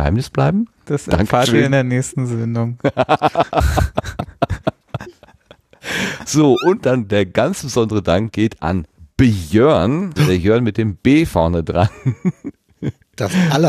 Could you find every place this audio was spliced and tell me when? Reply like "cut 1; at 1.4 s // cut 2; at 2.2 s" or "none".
cut 1; at 10.2 s